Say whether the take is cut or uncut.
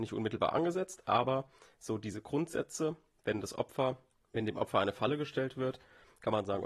uncut